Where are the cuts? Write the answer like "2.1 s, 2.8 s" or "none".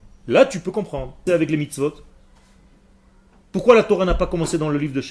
1.3 s